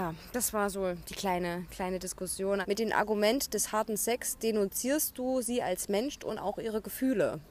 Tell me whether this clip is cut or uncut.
cut